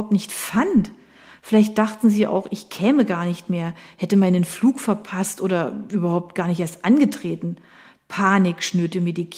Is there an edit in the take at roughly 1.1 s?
no; 0 cuts

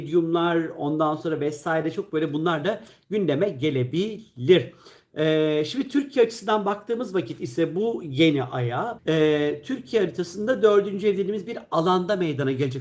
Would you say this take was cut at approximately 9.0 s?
yes; 1 cut; at 9.0 s

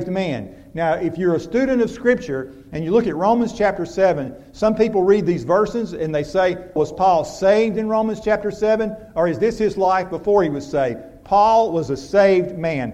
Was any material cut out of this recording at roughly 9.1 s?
no; 1 cut; at 6.8 s

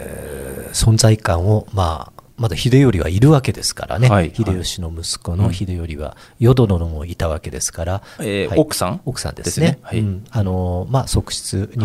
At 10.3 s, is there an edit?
no; 2 cuts; at 2.3 s, 8.2 s

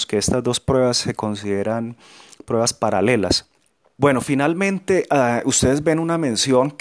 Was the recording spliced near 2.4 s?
no; 1 cut; at 4.0 s

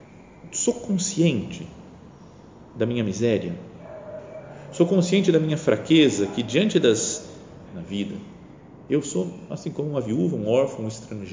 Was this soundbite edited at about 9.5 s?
no; 1 cut; at 7.7 s

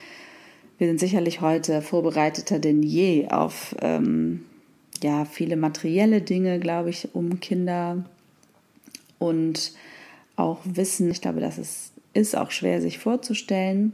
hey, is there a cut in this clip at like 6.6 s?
no; 1 cut; at 11.1 s

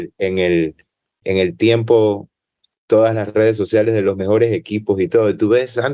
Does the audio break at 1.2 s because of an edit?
yes; 1 cut; at 1.2 s

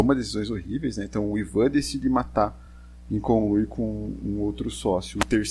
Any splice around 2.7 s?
no; 0 cuts

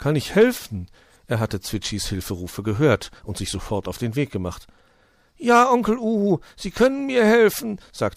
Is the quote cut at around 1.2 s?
yes; 1 cut; at 1.2 s

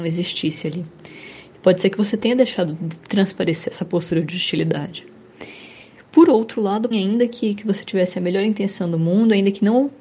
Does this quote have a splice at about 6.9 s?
yes; 1 cut; at 6.9 s

